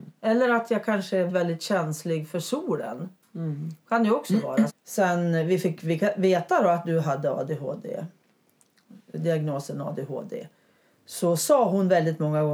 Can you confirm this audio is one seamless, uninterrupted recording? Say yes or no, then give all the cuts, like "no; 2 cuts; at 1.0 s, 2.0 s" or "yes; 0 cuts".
no; 2 cuts; at 1.3 s, 4.7 s